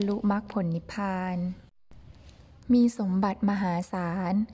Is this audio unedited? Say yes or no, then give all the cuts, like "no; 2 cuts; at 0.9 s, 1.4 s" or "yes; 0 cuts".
yes; 0 cuts